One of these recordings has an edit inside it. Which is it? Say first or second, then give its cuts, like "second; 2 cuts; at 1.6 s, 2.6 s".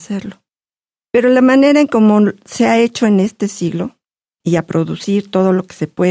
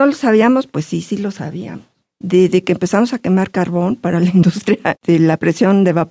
first; 1 cut; at 4.4 s